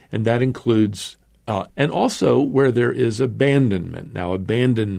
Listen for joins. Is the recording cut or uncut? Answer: cut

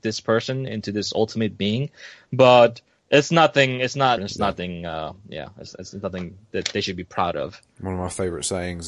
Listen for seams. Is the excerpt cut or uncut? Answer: cut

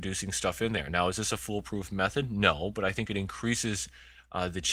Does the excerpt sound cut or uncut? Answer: uncut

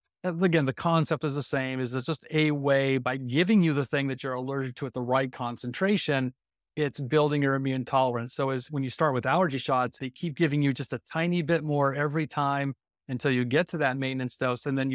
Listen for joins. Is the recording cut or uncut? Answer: cut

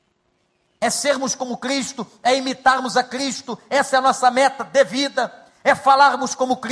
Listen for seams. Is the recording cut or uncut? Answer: uncut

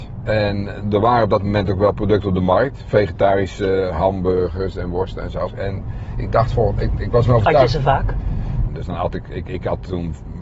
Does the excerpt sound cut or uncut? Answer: cut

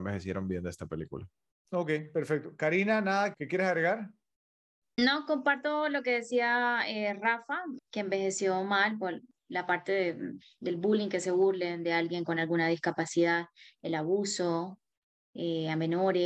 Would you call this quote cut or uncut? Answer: cut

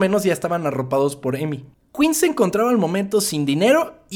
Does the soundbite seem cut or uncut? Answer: uncut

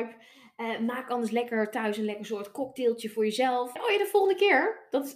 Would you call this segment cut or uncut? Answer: cut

